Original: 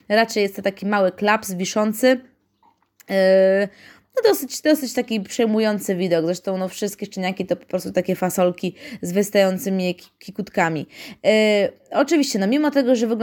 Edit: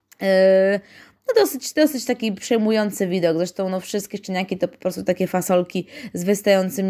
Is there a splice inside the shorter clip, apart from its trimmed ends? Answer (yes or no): no